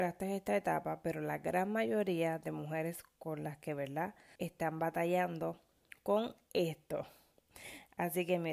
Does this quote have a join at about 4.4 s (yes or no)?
yes